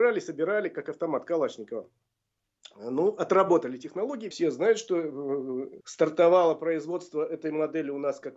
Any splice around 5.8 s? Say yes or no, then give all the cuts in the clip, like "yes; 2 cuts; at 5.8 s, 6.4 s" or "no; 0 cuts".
yes; 2 cuts; at 4.3 s, 5.8 s